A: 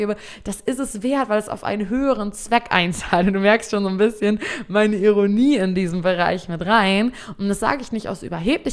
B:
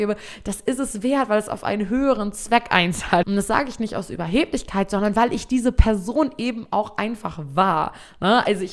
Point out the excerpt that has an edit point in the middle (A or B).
B